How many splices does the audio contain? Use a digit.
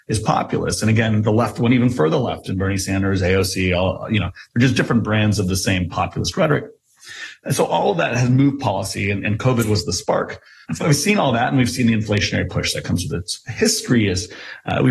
1